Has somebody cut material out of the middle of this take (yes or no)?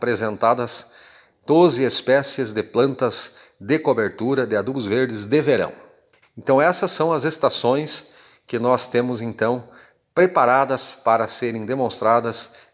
yes